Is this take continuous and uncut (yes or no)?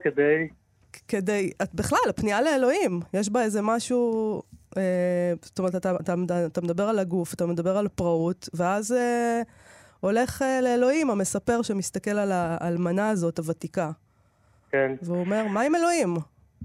yes